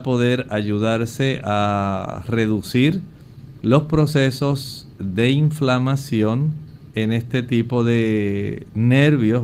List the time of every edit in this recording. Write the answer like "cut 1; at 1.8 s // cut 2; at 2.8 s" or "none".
none